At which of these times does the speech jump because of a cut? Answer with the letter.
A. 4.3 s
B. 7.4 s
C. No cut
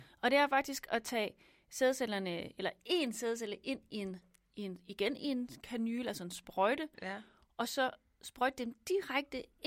C